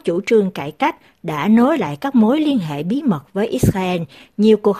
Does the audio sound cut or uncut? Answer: uncut